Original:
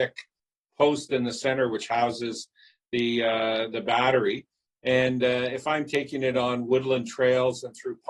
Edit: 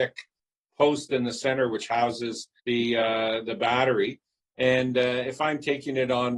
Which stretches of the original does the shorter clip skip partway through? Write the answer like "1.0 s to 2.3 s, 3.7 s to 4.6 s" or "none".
2.6 s to 2.8 s

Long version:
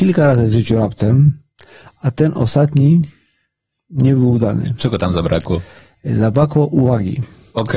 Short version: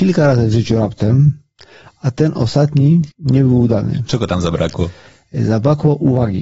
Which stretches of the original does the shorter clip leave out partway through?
3.1 s to 3.8 s

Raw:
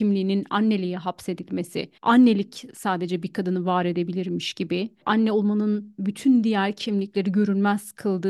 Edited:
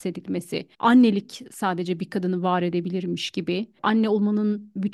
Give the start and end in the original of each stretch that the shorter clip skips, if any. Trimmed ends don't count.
none

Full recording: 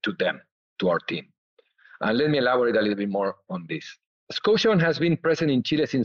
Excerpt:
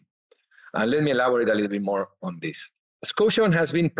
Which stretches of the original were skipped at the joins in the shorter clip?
none

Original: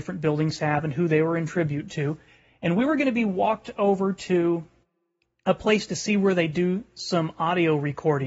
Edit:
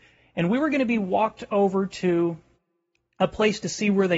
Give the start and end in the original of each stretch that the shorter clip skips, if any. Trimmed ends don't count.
none

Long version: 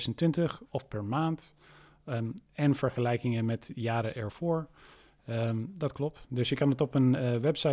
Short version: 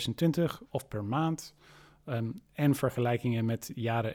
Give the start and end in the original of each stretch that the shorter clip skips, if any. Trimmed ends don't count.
none

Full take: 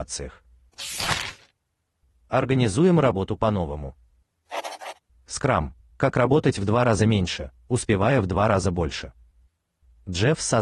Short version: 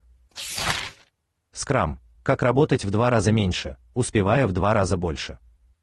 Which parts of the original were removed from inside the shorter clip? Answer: 1.9 s to 5.3 s

